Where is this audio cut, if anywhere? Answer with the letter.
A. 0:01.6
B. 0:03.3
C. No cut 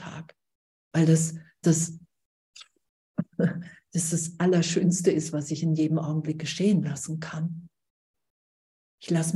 A